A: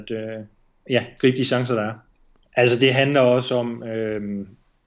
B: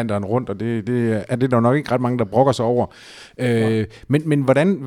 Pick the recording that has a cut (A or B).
A